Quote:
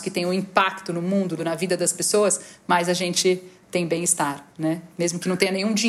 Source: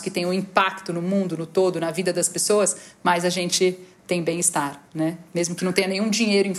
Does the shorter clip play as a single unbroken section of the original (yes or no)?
no